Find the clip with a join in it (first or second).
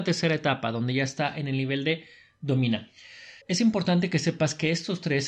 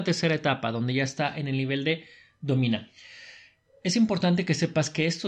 first